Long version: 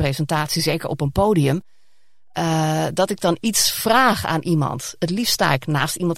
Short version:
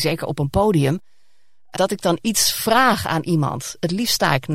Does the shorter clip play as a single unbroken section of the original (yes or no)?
no